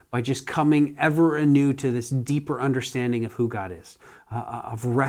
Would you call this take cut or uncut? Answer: uncut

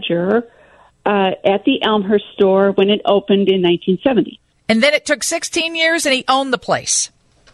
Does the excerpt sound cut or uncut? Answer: uncut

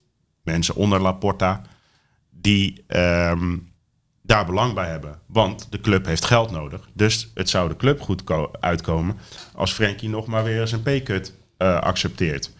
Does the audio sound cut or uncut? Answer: uncut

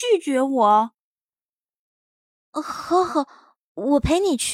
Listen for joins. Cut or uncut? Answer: cut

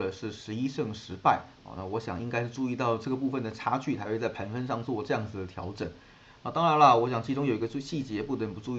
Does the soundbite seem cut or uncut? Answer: uncut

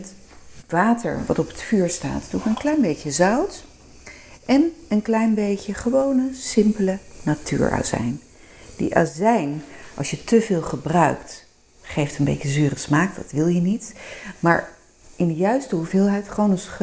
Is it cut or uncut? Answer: uncut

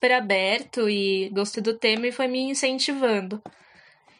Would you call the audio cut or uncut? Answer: cut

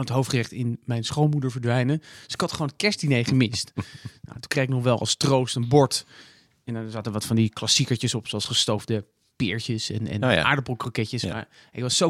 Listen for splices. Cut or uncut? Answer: uncut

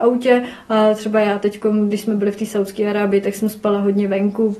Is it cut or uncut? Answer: uncut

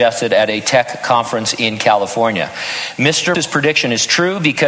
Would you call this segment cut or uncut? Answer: cut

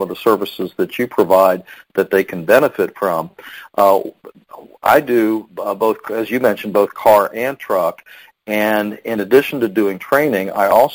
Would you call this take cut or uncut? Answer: uncut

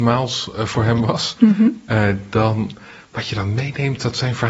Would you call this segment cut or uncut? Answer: uncut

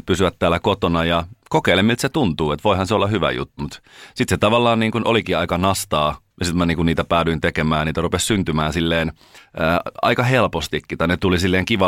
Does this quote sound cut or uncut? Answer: cut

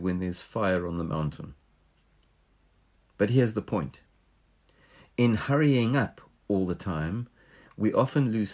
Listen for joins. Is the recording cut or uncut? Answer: uncut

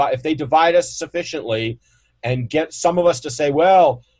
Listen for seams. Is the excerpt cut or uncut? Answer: uncut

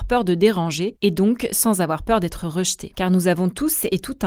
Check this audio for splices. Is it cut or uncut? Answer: uncut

